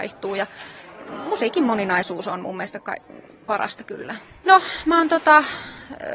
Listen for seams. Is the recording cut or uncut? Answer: cut